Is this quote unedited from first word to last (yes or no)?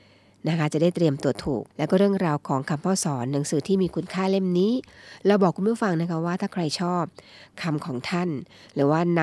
no